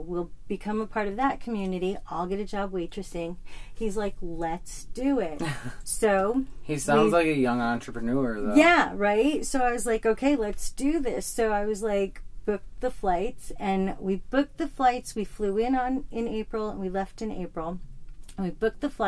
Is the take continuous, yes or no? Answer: yes